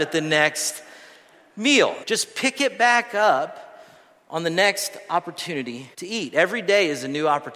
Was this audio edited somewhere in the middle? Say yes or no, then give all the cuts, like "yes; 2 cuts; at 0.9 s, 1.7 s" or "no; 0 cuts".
yes; 2 cuts; at 2.0 s, 5.9 s